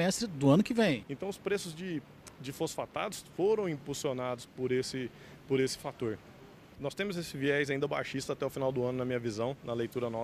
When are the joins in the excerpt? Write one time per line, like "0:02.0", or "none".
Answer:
0:01.0
0:06.7